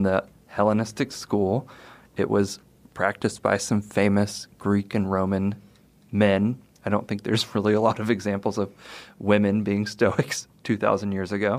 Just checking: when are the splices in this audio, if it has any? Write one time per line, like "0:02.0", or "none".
none